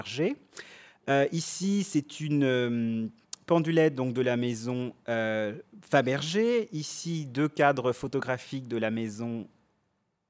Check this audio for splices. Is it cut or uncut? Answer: uncut